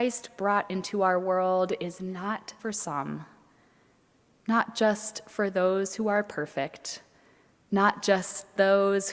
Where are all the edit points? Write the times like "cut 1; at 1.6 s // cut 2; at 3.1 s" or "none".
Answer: cut 1; at 2.6 s